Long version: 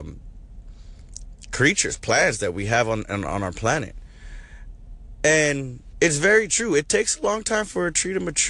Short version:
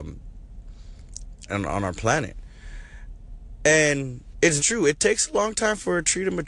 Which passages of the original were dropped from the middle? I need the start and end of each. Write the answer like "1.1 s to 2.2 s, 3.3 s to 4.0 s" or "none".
1.5 s to 3.0 s, 6.2 s to 6.5 s